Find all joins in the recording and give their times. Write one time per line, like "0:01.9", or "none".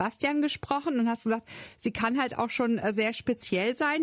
none